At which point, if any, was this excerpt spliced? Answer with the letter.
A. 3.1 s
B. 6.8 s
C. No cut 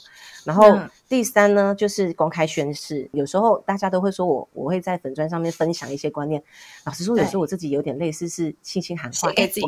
A